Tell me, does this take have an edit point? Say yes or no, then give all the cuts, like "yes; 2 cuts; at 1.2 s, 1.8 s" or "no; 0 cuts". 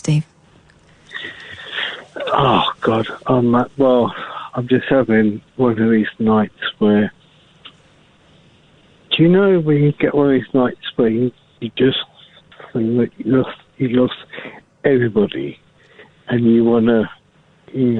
no; 0 cuts